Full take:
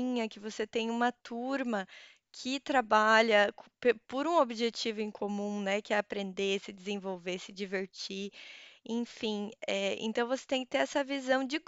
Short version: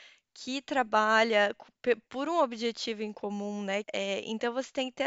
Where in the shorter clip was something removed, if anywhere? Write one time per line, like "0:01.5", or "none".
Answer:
0:03.8